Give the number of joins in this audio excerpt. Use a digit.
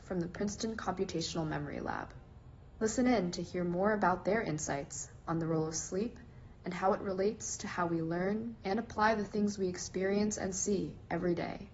1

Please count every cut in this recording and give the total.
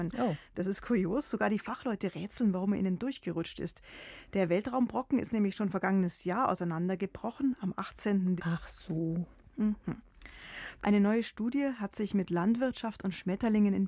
2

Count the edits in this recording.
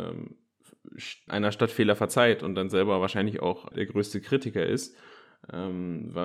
2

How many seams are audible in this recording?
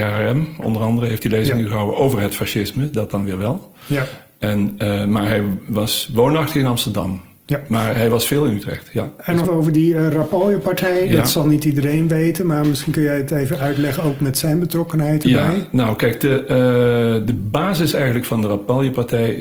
1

